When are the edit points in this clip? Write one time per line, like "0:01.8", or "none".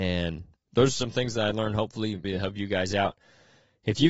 0:02.2